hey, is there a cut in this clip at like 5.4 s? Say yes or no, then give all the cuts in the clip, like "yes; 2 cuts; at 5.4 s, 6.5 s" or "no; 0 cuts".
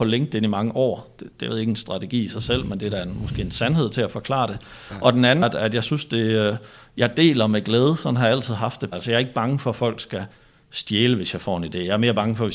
yes; 2 cuts; at 5.4 s, 8.9 s